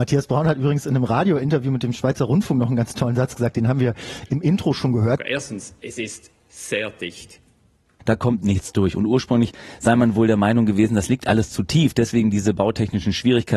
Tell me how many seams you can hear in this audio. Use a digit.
2